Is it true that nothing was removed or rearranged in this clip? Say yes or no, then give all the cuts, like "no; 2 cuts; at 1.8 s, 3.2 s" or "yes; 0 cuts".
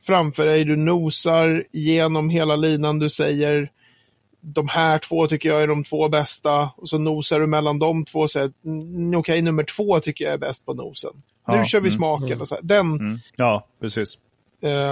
no; 1 cut; at 13.3 s